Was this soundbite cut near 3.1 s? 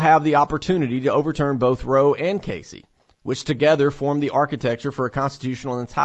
no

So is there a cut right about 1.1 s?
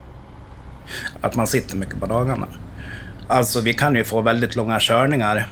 yes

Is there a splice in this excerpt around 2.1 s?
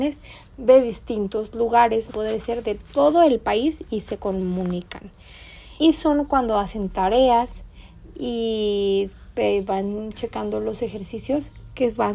yes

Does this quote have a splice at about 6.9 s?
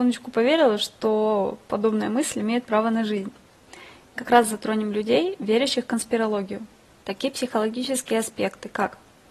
yes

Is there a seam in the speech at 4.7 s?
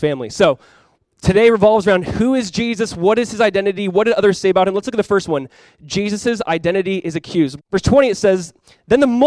no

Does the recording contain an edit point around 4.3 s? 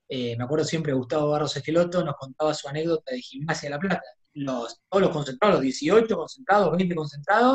yes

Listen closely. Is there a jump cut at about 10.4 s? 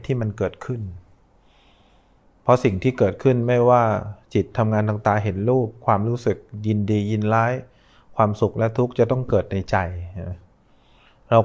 no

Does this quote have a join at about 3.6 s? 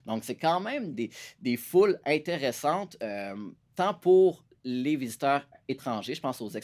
no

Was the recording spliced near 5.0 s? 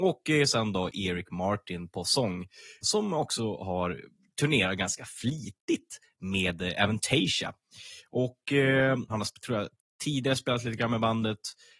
no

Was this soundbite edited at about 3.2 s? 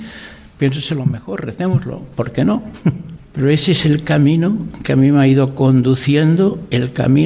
yes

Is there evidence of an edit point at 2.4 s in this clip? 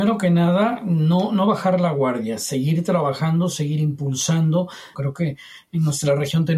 no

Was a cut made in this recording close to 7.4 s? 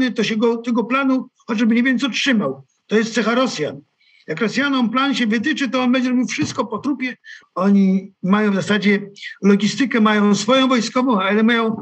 yes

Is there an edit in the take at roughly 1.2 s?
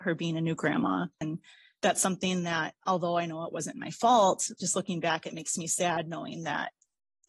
yes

